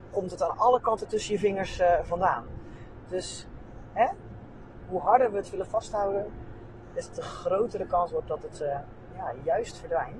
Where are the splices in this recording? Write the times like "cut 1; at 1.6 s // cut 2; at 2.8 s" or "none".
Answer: cut 1; at 3.0 s